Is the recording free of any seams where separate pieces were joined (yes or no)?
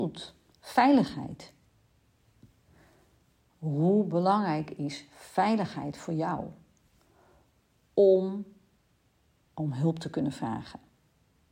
yes